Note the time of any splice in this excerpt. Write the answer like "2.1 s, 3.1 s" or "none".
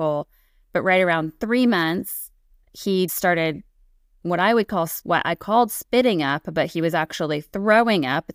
3.1 s